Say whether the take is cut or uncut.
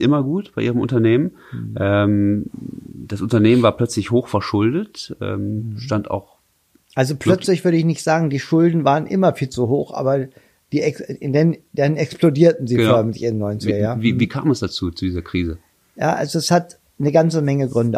uncut